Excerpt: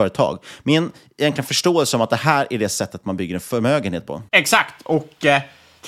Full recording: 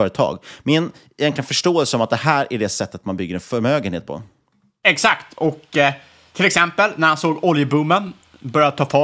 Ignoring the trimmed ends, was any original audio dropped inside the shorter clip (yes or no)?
yes